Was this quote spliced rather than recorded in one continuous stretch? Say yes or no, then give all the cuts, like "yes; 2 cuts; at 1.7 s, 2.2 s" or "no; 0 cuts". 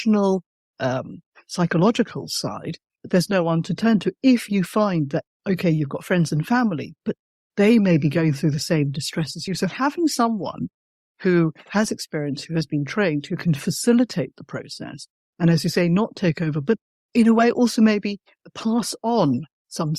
no; 0 cuts